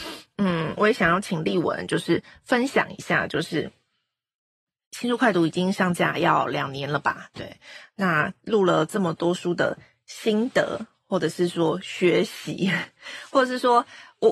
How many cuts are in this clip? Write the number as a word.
zero